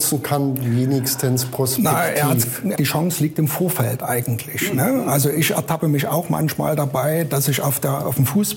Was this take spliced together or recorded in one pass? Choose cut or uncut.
cut